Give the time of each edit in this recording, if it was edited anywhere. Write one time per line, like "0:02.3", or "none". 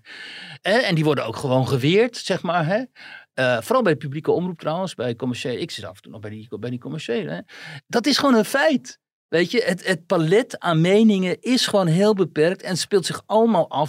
none